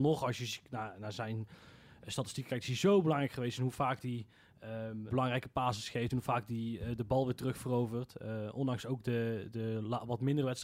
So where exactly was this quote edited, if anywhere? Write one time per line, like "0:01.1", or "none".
0:05.1

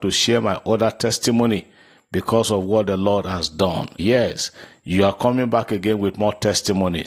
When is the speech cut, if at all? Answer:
0:04.0

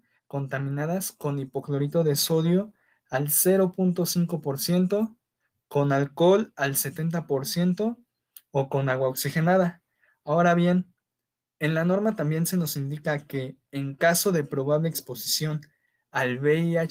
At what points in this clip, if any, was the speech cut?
none

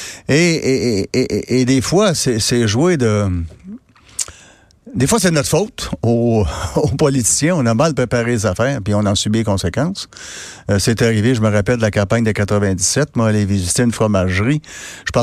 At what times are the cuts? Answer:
none

